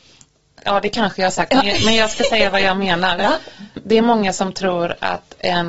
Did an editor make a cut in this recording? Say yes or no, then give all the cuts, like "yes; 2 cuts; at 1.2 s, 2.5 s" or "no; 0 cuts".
no; 0 cuts